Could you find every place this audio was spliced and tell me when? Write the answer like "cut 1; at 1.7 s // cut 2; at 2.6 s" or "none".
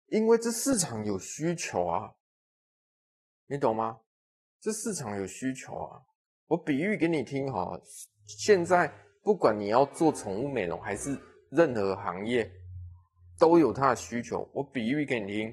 none